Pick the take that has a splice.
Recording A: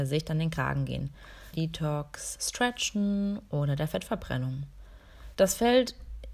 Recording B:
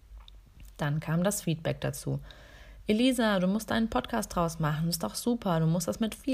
A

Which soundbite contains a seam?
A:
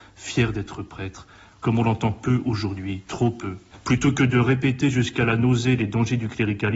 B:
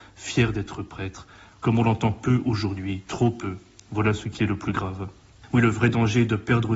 A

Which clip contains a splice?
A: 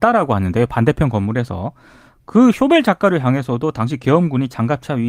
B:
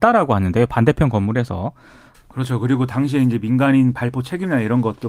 B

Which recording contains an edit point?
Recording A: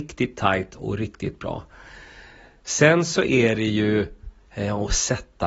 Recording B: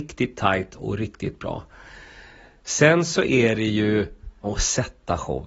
B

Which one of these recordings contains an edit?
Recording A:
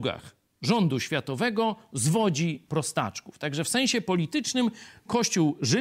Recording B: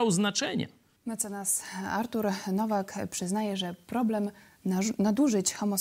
B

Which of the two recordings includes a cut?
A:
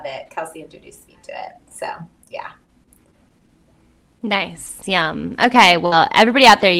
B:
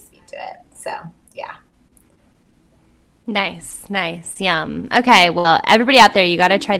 A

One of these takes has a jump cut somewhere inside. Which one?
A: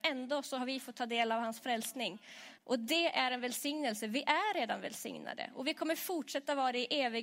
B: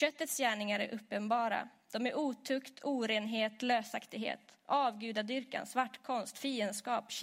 A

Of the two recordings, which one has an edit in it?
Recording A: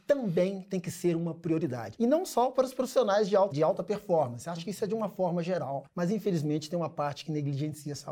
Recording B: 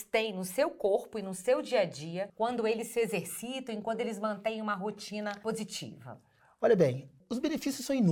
A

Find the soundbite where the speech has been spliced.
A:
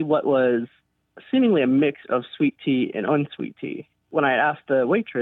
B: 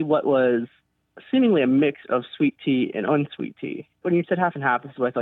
B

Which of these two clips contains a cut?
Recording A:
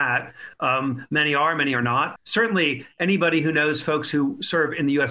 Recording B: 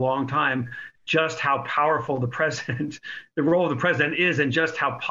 A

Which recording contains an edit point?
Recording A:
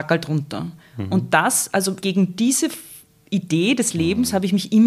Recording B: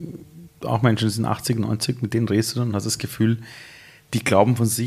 A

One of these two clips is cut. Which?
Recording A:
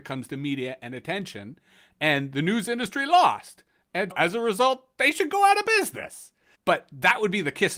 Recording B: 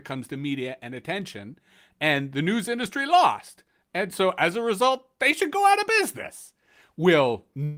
A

